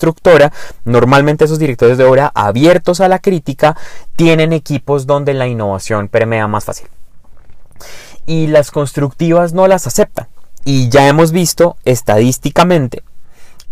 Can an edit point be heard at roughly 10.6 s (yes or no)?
yes